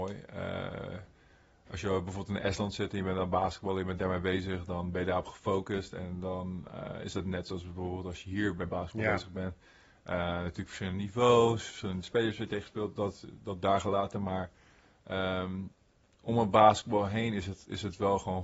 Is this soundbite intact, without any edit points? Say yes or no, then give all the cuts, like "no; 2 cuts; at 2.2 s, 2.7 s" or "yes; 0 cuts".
yes; 0 cuts